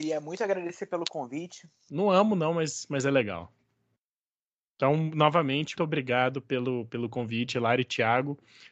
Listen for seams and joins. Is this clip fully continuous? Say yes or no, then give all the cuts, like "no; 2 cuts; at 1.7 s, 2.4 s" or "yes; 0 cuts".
no; 2 cuts; at 1.9 s, 5.7 s